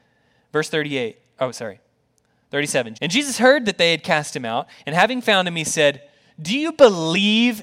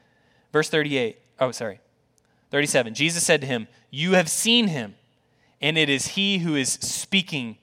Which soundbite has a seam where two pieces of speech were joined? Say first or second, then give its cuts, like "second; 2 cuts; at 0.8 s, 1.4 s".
first; 1 cut; at 2.9 s